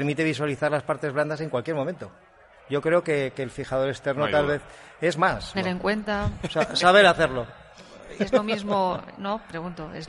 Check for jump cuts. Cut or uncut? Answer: cut